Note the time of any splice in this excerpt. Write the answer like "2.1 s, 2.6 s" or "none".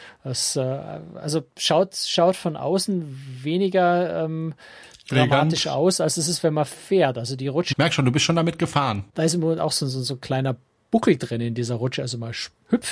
7.7 s, 9.1 s